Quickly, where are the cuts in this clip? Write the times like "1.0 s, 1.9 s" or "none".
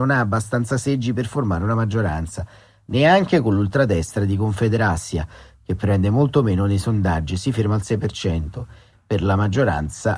8.9 s